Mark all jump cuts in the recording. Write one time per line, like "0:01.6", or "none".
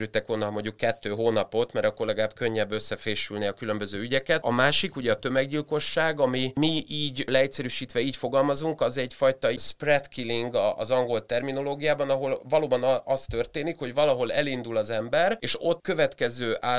none

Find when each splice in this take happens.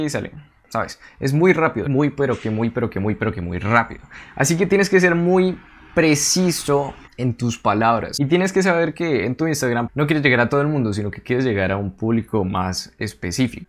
0:01.8

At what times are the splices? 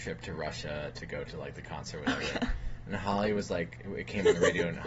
none

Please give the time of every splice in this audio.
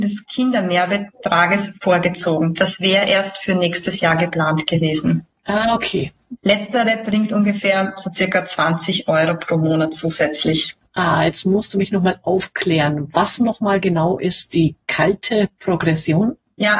0:06.4

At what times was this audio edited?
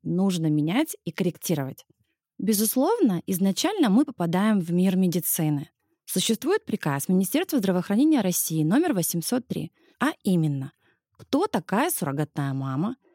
0:02.2
0:09.9

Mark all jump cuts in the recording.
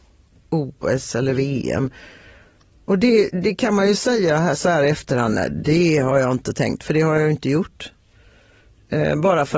none

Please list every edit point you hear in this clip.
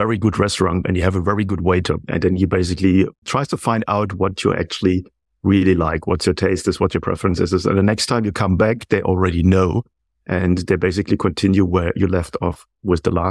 none

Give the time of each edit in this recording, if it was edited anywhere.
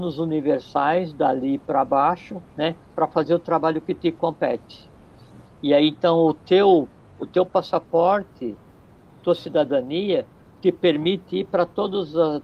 0:05.5

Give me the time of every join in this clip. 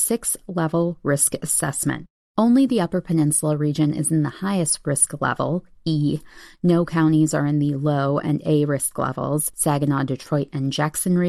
0:09.5

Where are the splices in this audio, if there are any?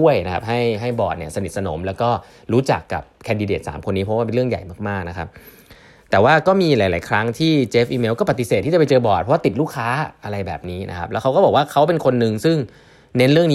none

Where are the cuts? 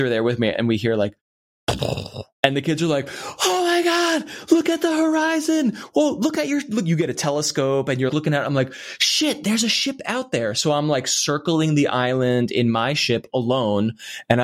0:02.4
0:08.1

